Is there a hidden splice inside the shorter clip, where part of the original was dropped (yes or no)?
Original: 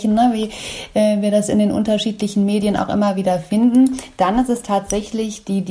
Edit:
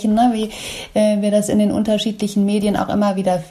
no